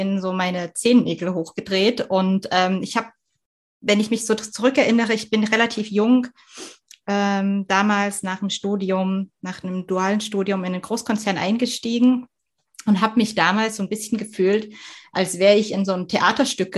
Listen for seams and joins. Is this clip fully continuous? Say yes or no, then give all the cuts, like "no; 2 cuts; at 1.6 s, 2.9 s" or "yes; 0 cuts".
yes; 0 cuts